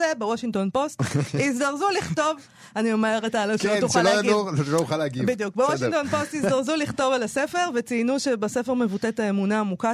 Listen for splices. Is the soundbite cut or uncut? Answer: uncut